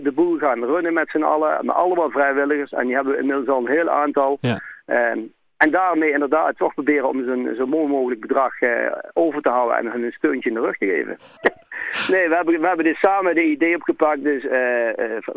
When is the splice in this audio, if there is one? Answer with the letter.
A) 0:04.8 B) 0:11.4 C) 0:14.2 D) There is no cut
B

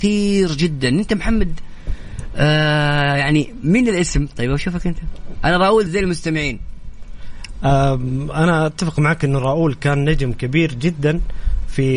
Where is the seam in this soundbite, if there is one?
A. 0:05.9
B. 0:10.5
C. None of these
A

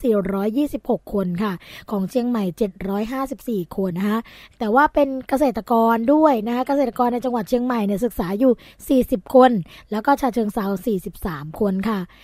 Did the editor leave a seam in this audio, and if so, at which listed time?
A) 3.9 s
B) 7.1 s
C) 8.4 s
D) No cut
A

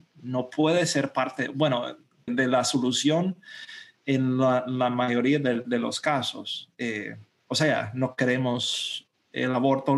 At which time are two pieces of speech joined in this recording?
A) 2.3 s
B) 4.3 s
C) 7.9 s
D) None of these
A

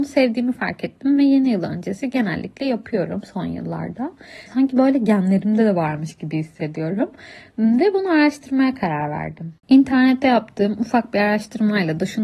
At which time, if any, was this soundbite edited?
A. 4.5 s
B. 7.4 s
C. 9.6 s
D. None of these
A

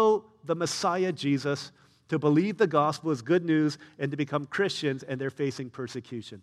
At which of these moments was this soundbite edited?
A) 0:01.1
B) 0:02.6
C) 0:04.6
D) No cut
D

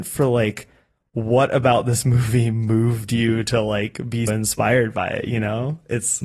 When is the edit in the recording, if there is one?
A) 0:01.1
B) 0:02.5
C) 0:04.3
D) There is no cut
C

